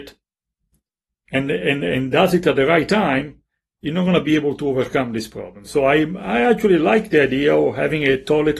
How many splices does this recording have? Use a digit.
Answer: 0